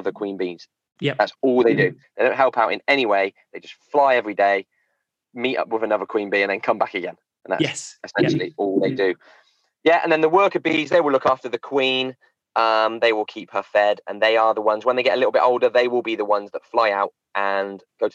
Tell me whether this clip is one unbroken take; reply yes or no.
no